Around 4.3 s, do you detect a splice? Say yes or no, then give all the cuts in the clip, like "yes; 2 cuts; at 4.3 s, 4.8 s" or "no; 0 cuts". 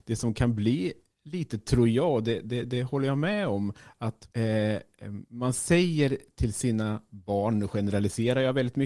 yes; 1 cut; at 4.3 s